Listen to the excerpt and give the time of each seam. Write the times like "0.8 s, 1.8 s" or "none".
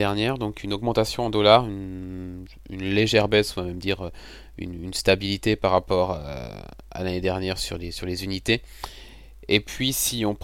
none